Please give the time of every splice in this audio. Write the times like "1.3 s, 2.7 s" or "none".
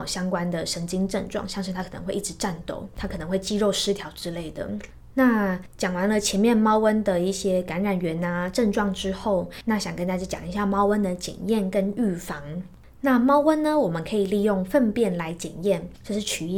none